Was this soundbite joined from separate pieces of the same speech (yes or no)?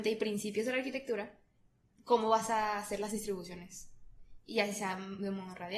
no